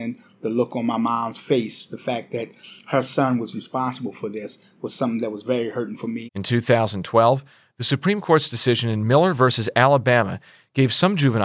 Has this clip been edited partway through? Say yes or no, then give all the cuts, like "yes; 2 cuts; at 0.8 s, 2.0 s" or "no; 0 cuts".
yes; 2 cuts; at 1.9 s, 6.3 s